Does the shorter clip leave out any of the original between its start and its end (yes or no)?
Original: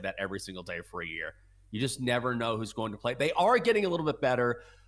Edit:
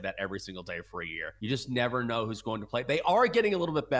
yes